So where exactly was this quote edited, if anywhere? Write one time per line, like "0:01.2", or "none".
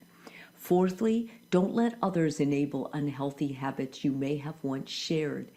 none